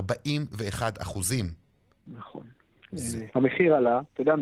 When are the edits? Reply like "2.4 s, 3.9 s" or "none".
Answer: 3.3 s